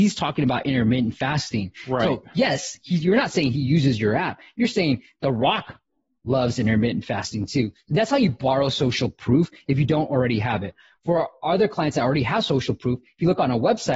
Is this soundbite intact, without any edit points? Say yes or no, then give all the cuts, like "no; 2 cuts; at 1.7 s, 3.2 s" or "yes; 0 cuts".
yes; 0 cuts